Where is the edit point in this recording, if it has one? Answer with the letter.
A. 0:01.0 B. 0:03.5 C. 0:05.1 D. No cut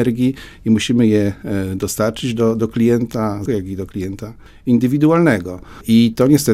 B